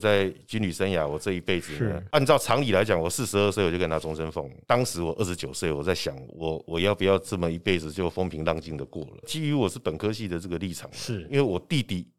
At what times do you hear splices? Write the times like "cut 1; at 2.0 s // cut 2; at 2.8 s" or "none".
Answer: cut 1; at 9.2 s